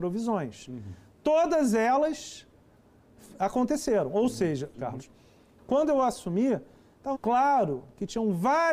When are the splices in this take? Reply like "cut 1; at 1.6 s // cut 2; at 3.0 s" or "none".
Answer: cut 1; at 4.7 s // cut 2; at 7.1 s